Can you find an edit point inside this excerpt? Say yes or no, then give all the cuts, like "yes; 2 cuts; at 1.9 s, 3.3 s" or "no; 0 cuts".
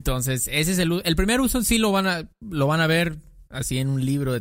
no; 0 cuts